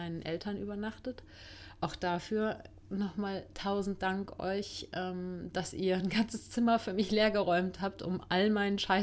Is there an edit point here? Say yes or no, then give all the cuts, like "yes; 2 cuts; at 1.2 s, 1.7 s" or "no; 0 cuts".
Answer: no; 0 cuts